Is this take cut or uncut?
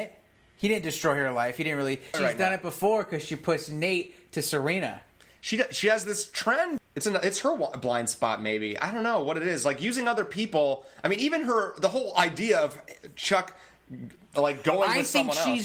cut